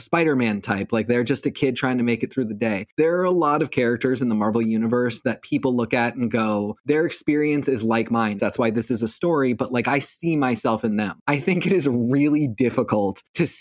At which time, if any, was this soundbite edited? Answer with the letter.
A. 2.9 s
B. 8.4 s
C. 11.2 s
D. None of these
B